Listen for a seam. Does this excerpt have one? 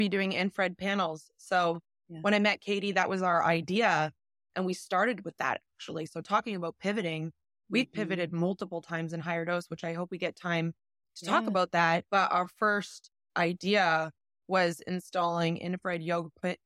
no; 0 cuts

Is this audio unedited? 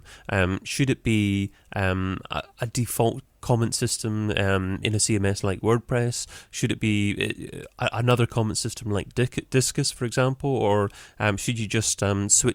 yes; 0 cuts

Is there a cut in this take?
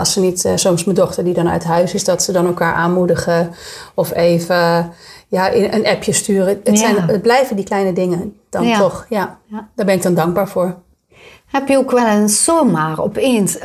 no; 0 cuts

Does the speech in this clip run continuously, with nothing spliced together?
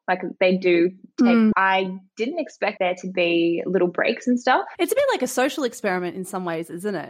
no; 2 cuts; at 1.5 s, 4.7 s

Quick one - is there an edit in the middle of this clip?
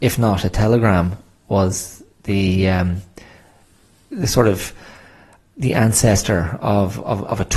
no; 0 cuts

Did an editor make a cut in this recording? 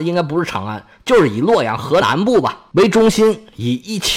yes; 1 cut; at 2.0 s

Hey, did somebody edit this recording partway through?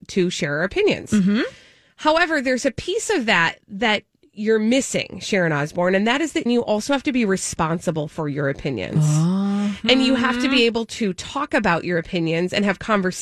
yes; 1 cut; at 6.5 s

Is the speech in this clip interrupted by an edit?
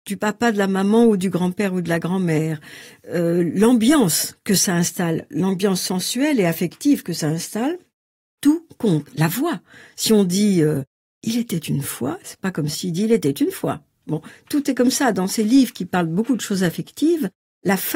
no; 0 cuts

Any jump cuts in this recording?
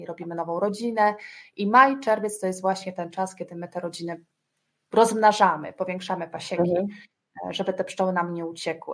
no; 0 cuts

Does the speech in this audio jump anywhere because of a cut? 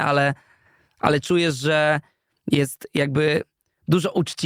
no; 0 cuts

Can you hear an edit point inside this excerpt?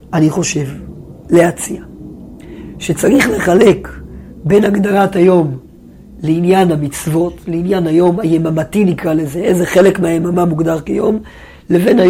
no; 0 cuts

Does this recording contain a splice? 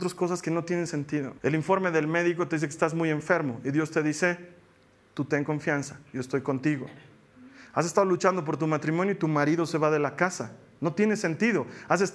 yes; 1 cut; at 1.4 s

